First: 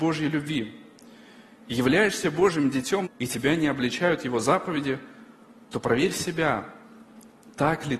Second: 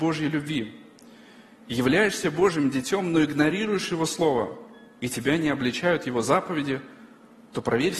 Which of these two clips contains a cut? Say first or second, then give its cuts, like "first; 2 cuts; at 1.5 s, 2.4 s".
first; 1 cut; at 3.0 s